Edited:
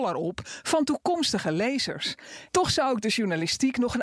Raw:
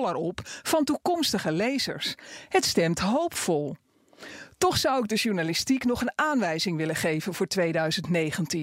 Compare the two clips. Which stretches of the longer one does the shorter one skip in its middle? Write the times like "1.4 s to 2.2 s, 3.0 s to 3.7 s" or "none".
2.5 s to 4.5 s